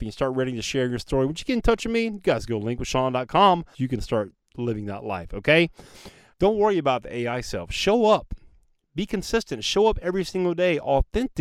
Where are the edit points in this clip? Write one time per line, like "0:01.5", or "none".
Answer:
0:03.7
0:06.3